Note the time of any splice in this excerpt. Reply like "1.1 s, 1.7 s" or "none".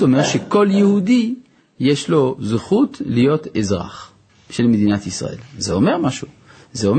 none